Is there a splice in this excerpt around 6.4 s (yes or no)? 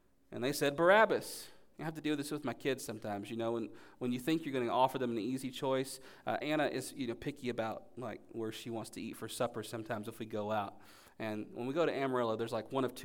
no